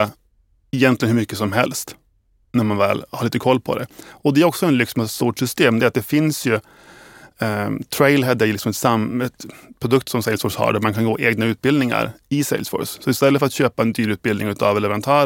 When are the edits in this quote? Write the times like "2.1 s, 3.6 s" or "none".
none

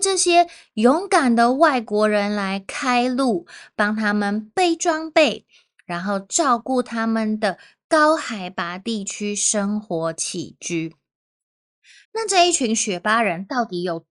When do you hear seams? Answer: 12.0 s

